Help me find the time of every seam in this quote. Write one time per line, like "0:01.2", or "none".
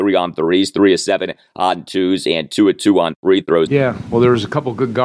0:03.7